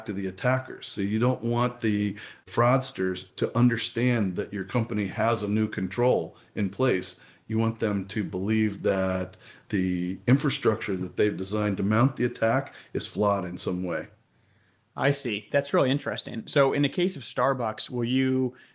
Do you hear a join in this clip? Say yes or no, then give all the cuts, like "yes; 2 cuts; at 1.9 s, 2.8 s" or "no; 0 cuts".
no; 0 cuts